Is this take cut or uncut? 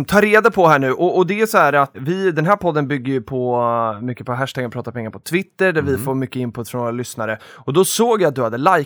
cut